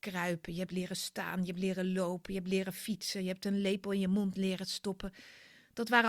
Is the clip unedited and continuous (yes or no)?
yes